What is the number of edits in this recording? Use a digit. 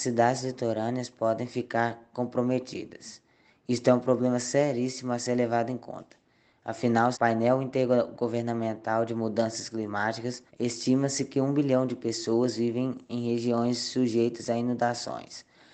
2